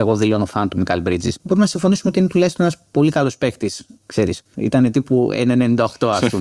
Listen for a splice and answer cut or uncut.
cut